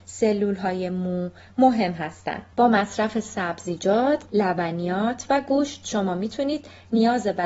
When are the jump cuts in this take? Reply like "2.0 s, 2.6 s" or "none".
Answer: 4.3 s

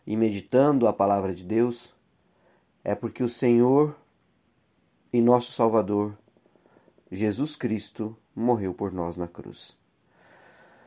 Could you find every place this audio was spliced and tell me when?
none

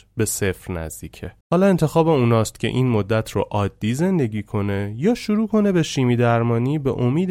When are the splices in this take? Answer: 1.4 s

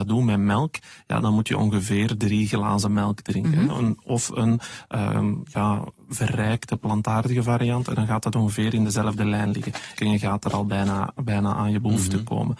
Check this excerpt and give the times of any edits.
10.0 s

